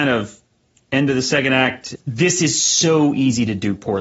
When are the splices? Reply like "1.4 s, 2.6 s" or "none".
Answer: 2.0 s